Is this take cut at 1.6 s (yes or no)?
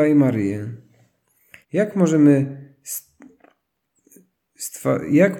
yes